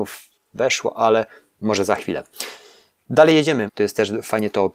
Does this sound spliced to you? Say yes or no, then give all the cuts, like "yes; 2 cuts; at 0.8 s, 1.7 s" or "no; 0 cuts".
yes; 1 cut; at 3.7 s